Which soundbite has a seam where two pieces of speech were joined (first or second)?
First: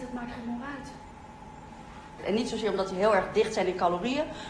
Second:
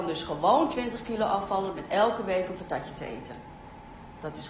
first